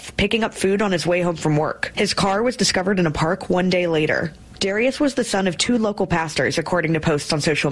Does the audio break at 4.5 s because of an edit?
no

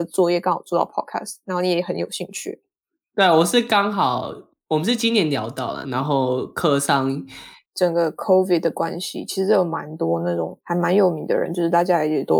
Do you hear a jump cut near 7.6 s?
yes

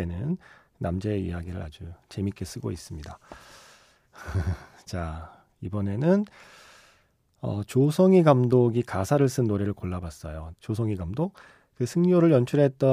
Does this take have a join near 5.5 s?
no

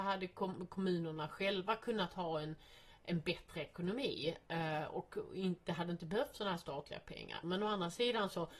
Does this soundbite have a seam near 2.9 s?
no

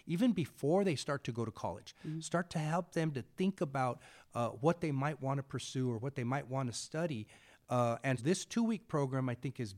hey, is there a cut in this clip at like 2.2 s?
no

